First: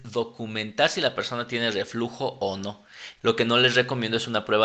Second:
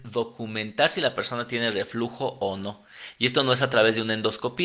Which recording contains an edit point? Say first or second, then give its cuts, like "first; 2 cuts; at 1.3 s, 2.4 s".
first; 1 cut; at 3.2 s